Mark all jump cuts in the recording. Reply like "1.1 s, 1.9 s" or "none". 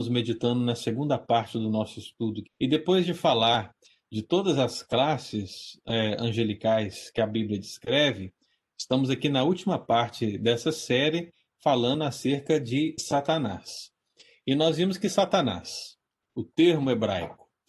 2.4 s